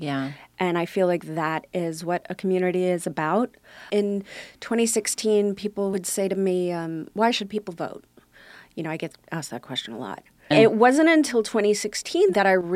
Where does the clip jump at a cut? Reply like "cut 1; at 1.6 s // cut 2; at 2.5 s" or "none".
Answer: cut 1; at 10.5 s